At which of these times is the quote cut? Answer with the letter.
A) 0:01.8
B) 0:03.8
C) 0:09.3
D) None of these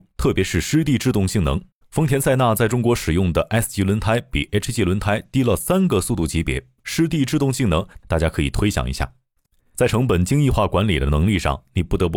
A